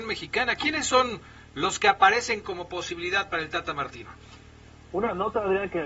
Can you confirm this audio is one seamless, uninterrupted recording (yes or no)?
yes